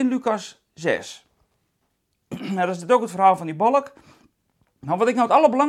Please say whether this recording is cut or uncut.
uncut